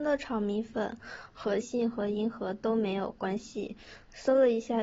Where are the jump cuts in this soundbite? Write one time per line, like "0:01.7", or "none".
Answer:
0:01.6